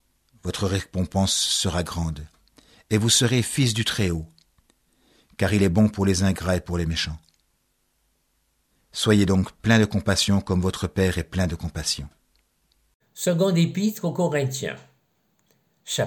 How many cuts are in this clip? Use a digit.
1